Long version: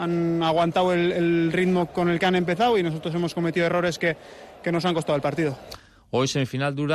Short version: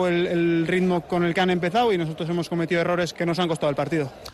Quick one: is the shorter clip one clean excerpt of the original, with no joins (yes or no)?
no